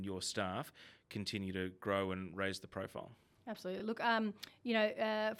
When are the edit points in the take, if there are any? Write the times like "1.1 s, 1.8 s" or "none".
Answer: none